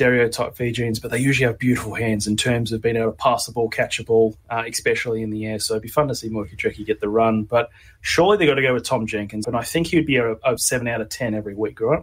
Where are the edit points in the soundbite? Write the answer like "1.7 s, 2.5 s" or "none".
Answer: 9.4 s, 10.6 s